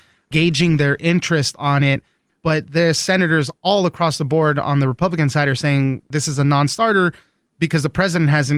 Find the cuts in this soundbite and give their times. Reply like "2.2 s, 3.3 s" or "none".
2.3 s